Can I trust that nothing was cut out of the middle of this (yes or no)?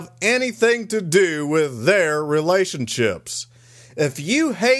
yes